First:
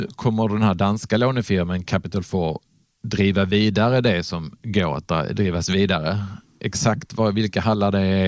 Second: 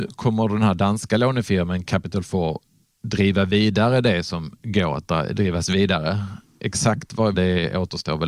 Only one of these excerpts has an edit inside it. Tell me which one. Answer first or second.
second